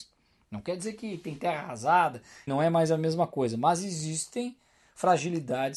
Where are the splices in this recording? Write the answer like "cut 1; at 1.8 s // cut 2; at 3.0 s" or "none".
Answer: cut 1; at 2.5 s